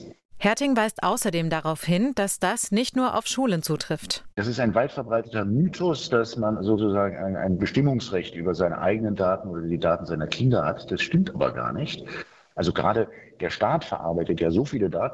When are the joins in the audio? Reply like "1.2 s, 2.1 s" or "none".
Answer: none